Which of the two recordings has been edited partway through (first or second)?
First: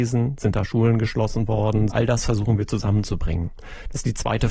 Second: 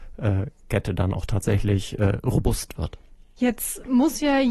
first